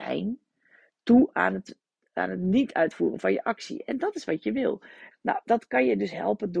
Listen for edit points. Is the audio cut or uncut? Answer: cut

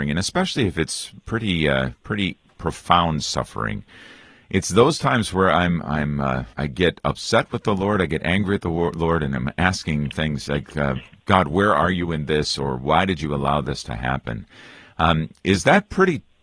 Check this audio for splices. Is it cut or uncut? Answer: cut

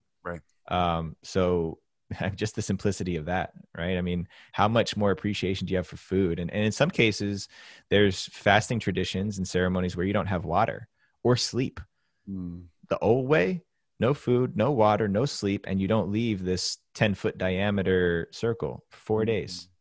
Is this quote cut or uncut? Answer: uncut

